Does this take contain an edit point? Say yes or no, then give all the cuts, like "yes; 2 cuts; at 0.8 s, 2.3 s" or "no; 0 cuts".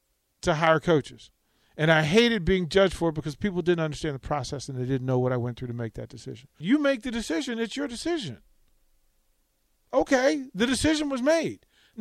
yes; 1 cut; at 6.6 s